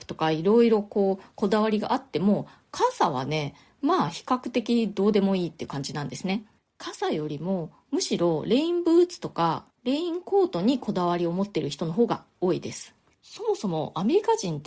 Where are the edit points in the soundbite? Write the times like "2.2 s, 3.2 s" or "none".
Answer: none